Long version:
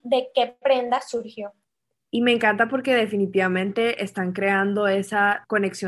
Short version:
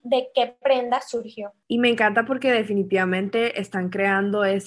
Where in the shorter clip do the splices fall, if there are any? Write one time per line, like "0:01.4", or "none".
0:01.6